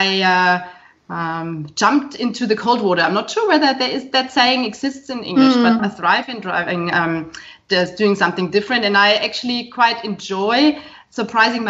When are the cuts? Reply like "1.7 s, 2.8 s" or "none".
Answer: 5.8 s